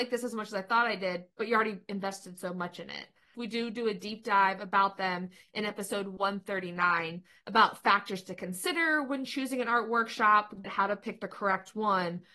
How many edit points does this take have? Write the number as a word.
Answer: two